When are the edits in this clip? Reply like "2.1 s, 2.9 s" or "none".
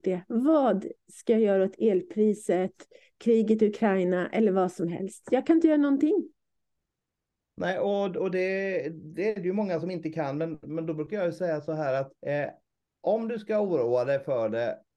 12.2 s